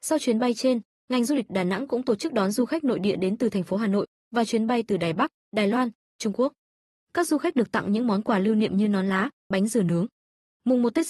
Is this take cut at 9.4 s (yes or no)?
yes